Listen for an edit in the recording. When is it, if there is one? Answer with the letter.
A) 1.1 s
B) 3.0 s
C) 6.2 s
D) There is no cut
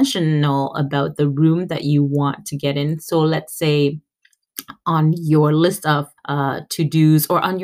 C